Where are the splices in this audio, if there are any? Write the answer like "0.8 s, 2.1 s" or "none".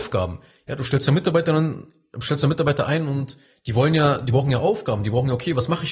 none